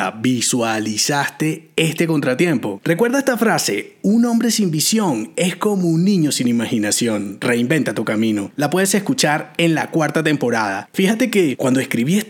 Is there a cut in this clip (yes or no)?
yes